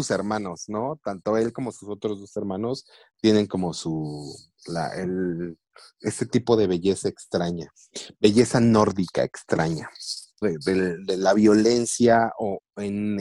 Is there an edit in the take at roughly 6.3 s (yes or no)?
no